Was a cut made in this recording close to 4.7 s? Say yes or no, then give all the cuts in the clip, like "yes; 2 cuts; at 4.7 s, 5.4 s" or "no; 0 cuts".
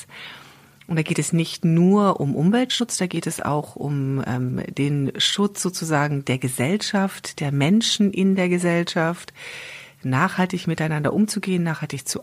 no; 0 cuts